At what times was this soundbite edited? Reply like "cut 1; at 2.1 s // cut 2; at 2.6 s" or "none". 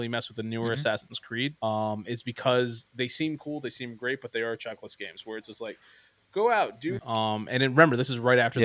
cut 1; at 1.6 s // cut 2; at 7.0 s